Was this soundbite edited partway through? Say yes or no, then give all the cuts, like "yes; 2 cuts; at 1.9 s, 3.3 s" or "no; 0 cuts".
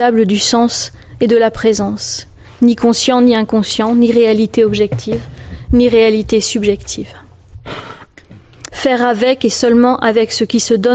yes; 1 cut; at 8.7 s